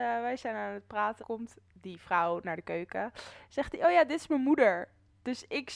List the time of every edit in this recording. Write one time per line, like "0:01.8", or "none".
0:01.2